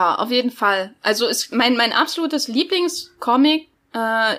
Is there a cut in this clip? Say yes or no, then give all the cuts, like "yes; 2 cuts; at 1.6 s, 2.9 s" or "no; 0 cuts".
no; 0 cuts